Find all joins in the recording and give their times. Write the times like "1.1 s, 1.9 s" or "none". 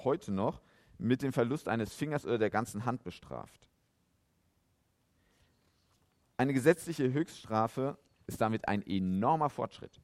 8.3 s